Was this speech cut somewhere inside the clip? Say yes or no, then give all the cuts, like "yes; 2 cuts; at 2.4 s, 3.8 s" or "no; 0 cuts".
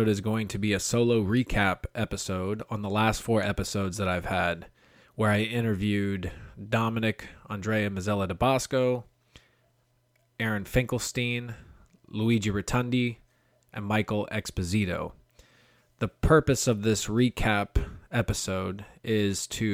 no; 0 cuts